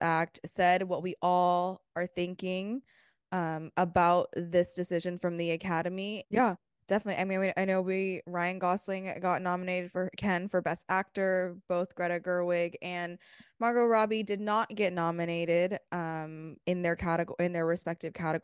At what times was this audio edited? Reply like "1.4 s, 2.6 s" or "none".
6.2 s